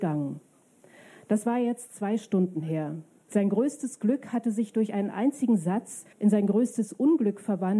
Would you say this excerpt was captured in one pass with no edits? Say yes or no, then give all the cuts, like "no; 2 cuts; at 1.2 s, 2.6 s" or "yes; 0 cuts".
no; 2 cuts; at 3.3 s, 6.1 s